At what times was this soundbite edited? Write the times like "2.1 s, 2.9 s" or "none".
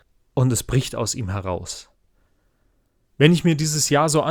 3.0 s